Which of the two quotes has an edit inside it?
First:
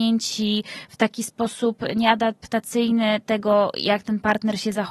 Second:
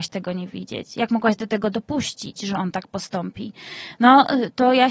second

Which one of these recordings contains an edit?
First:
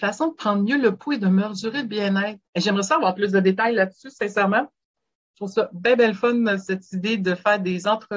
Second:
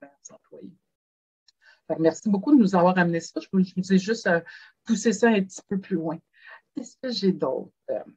first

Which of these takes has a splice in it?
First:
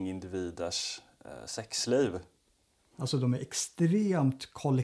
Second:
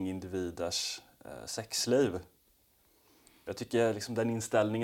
first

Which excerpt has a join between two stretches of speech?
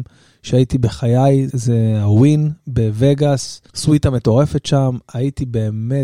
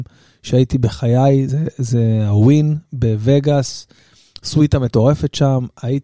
first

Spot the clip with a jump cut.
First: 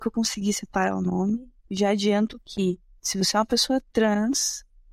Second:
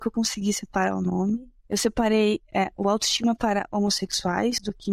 first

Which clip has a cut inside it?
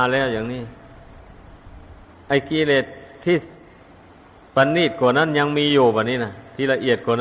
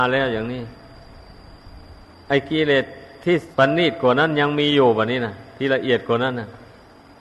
second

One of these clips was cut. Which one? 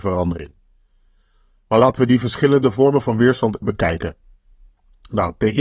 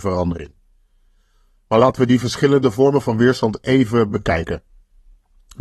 first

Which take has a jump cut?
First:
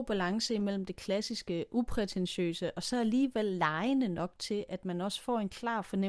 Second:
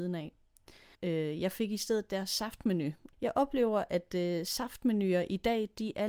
second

